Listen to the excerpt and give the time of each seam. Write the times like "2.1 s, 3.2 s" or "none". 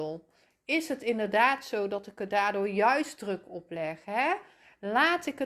none